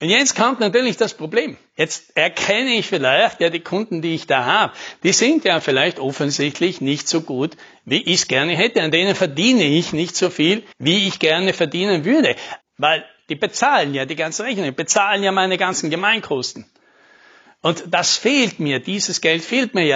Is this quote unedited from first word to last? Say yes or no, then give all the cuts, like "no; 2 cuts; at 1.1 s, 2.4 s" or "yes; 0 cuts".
no; 2 cuts; at 10.7 s, 12.6 s